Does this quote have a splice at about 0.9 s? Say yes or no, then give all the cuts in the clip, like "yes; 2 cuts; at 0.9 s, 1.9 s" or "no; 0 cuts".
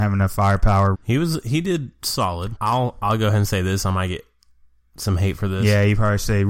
yes; 2 cuts; at 0.9 s, 2.6 s